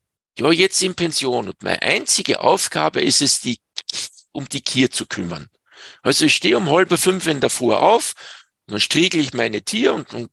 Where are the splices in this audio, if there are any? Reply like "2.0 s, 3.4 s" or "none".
none

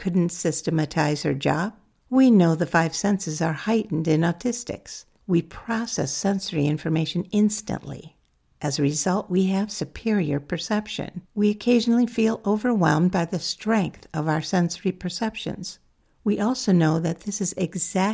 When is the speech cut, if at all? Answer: 11.3 s

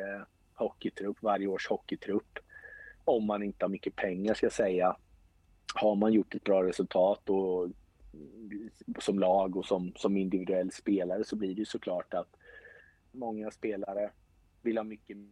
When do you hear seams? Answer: 13.1 s

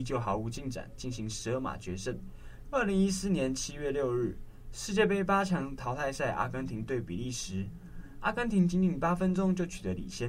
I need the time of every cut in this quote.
2.6 s

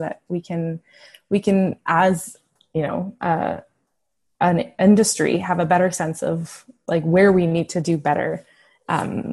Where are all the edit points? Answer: none

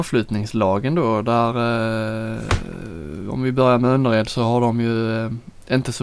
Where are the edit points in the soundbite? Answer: none

